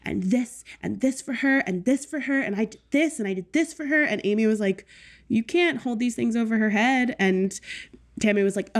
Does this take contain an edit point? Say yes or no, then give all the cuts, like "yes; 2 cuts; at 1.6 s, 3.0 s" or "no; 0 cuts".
no; 0 cuts